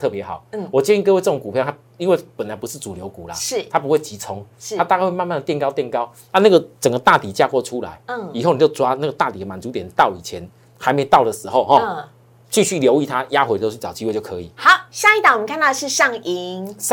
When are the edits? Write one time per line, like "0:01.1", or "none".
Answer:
none